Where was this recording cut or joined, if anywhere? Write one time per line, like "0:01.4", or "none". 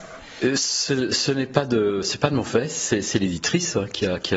none